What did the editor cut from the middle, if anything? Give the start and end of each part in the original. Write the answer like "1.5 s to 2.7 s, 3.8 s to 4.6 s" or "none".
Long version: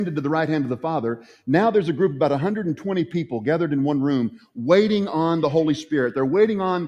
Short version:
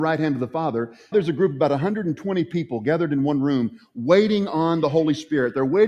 1.4 s to 1.7 s